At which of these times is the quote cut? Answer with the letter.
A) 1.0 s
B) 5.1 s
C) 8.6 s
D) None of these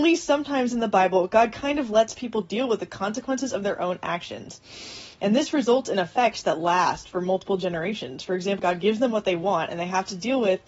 C